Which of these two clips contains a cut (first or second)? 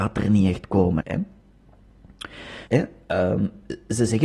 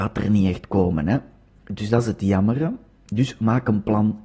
first